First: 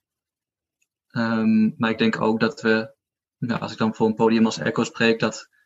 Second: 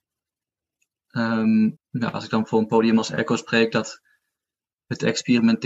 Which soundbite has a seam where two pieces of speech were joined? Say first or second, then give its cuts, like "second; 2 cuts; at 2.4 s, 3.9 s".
second; 1 cut; at 1.8 s